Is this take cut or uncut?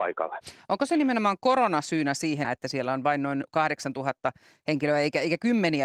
cut